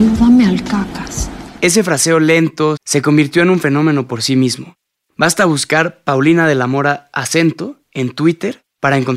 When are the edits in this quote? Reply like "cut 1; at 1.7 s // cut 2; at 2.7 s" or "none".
cut 1; at 2.8 s

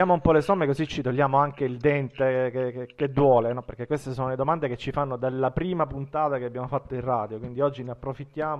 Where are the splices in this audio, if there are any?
none

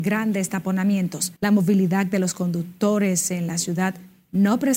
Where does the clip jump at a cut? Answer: cut 1; at 1.4 s

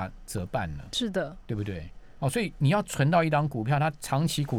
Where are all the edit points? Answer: none

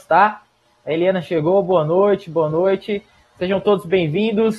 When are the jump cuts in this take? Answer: none

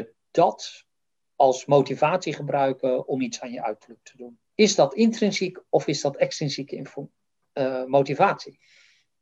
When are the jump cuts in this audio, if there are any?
cut 1; at 4.5 s

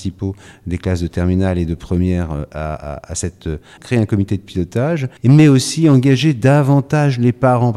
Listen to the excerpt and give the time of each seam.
cut 1; at 3.8 s // cut 2; at 5.2 s

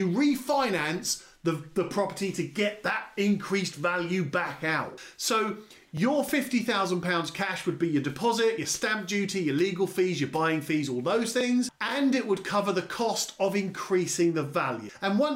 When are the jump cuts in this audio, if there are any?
none

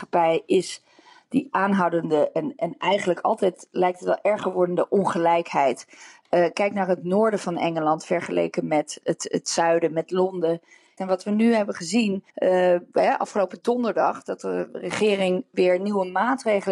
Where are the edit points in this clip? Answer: cut 1; at 11.0 s // cut 2; at 12.3 s

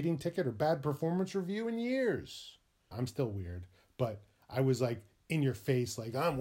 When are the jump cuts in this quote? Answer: cut 1; at 2.9 s

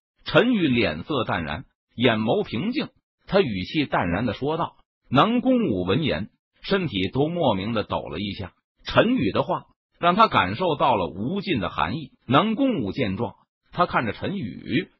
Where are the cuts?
cut 1; at 12.2 s

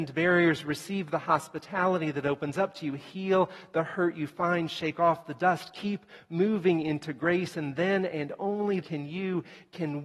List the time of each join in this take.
cut 1; at 8.8 s

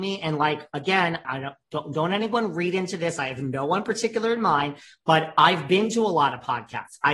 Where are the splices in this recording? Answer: cut 1; at 1.2 s

